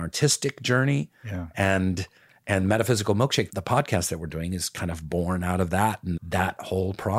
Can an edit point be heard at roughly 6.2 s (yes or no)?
yes